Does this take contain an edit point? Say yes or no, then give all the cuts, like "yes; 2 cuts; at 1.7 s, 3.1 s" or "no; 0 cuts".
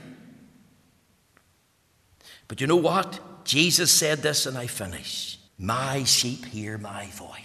yes; 1 cut; at 5.5 s